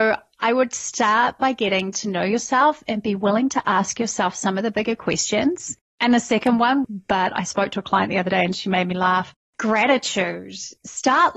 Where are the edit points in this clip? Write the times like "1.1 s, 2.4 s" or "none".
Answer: 6.8 s